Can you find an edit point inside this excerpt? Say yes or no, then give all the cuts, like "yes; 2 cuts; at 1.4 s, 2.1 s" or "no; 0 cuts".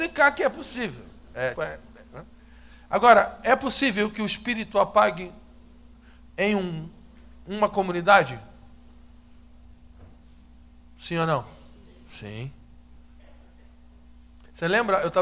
yes; 1 cut; at 1.6 s